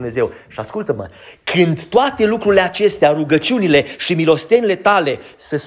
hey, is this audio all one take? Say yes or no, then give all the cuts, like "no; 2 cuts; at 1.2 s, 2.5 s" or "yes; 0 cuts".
yes; 0 cuts